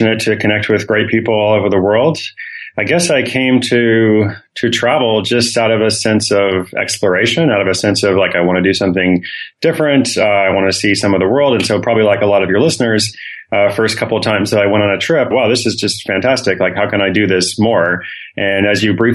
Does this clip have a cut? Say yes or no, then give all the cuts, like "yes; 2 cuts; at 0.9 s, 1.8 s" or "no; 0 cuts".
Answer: yes; 1 cut; at 15.3 s